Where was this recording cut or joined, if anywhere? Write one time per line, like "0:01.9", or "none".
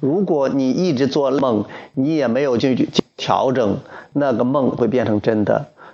0:02.6

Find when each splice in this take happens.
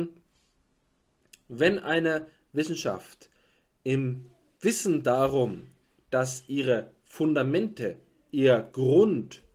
none

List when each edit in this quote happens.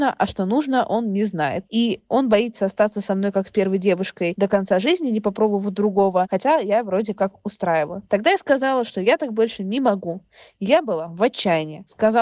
none

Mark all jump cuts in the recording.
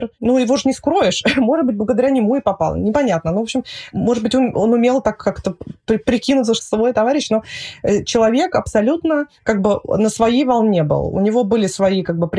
0:06.6

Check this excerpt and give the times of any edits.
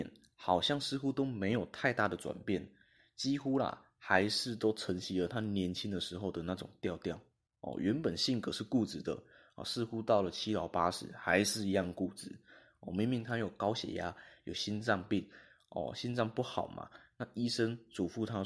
none

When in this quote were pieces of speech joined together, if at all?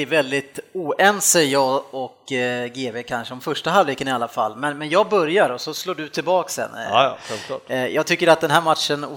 none

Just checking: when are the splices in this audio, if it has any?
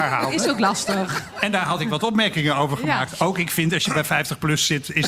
none

